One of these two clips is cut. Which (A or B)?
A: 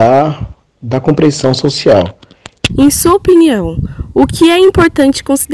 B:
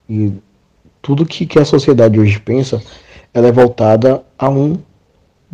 A